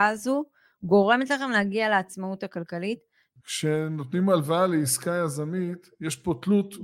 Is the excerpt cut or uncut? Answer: cut